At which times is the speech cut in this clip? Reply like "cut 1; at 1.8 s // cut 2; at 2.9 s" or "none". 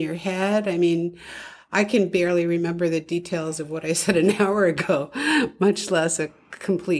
none